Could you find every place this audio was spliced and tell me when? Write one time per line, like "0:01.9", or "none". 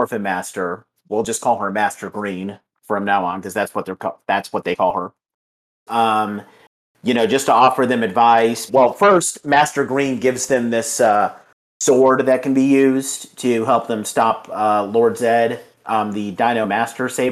0:05.9
0:08.7